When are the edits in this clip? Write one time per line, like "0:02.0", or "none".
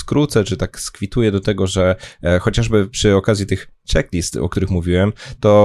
none